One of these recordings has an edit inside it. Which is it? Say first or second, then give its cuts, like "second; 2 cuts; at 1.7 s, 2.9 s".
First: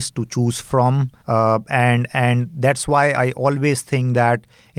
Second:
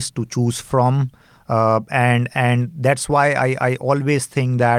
first; 2 cuts; at 1.2 s, 3.1 s